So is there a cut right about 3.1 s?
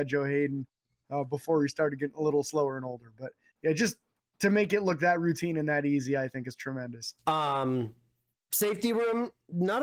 no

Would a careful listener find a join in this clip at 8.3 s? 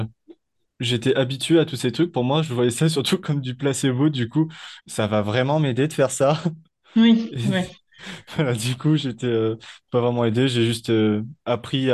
no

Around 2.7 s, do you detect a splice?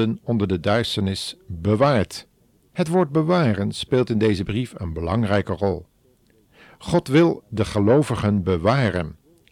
yes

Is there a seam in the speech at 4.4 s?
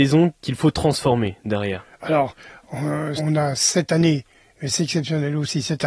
no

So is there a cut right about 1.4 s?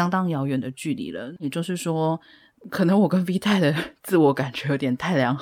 yes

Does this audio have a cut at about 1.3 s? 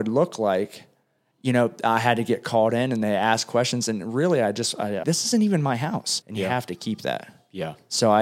no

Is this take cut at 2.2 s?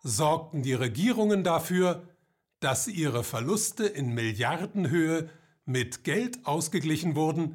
no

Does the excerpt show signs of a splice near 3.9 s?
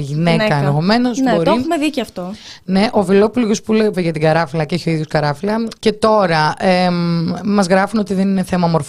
yes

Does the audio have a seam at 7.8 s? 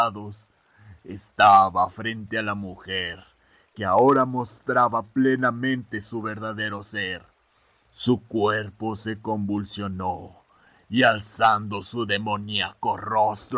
yes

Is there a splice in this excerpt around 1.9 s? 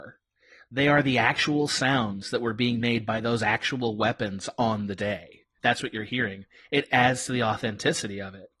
no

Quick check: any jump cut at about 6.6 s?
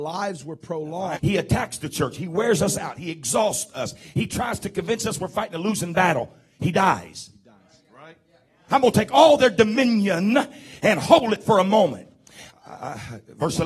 no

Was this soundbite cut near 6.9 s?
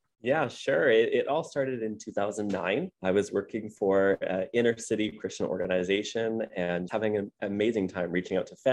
yes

